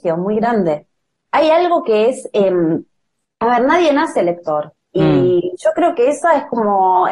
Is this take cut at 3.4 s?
no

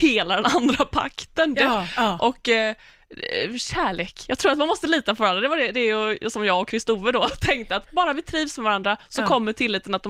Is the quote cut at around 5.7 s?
no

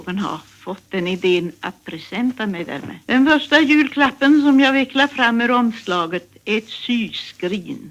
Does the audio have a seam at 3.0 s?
yes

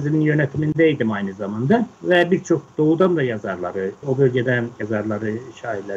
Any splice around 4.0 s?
yes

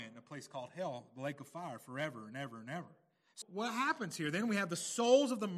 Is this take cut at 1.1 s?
no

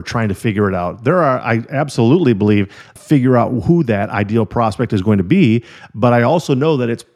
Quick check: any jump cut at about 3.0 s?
yes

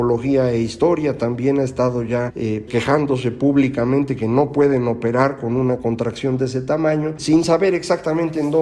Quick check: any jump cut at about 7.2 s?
yes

